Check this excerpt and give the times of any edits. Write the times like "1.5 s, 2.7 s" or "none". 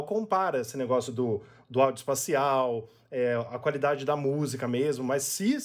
none